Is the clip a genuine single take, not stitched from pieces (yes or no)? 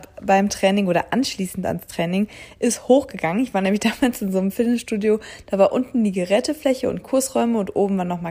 yes